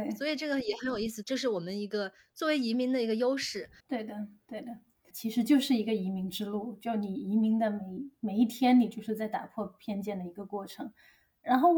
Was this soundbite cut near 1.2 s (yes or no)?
yes